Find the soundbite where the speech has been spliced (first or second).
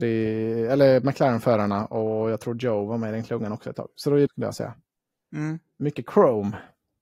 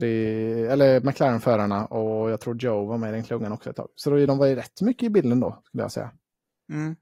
first